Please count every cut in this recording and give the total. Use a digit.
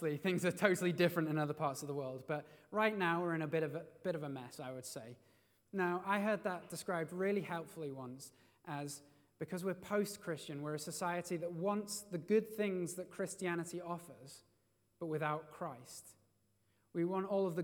1